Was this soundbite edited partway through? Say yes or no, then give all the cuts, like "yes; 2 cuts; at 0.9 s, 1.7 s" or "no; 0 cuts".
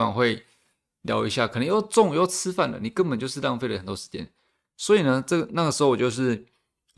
no; 0 cuts